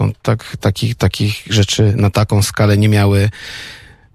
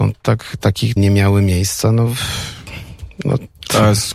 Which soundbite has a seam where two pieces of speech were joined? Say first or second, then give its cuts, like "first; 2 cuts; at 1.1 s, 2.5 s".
second; 1 cut; at 1.0 s